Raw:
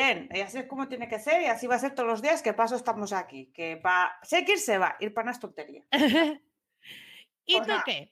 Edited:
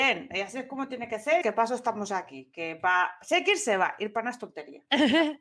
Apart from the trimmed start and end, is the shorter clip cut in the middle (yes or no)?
yes